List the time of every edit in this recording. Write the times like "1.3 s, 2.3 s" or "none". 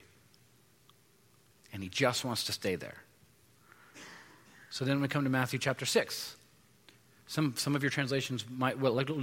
7.2 s